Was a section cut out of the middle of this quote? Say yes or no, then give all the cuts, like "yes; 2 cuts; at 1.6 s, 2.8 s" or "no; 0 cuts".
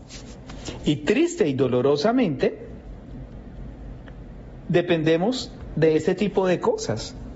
no; 0 cuts